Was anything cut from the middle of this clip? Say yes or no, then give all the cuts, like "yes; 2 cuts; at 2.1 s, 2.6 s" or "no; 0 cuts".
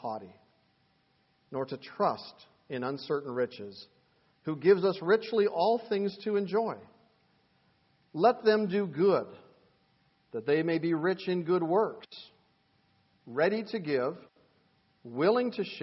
yes; 1 cut; at 4.4 s